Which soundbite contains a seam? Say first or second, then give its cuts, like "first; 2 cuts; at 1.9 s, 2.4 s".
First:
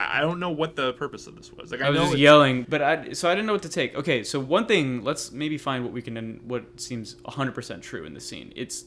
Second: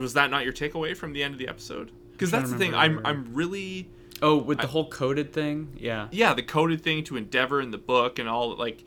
first; 1 cut; at 2.6 s